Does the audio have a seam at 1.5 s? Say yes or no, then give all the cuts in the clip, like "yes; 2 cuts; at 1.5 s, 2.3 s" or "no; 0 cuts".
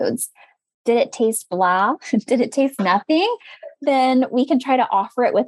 no; 1 cut; at 2.8 s